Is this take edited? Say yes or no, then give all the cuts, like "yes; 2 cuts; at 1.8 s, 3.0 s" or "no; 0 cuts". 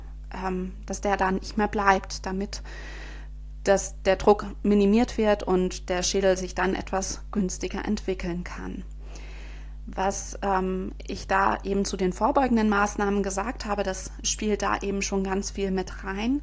no; 0 cuts